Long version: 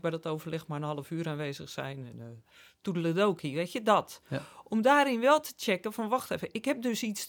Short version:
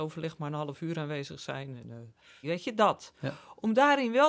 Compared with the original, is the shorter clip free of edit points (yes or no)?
no